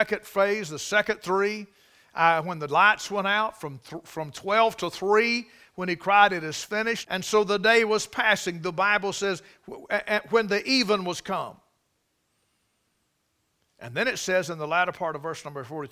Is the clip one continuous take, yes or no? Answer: no